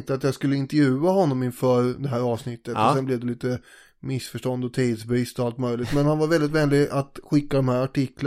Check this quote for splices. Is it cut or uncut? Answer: uncut